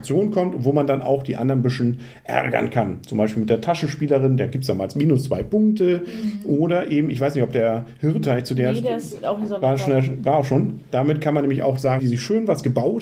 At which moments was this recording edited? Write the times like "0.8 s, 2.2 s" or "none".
10.9 s, 12.0 s